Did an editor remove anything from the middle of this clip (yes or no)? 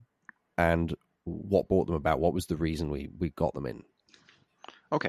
no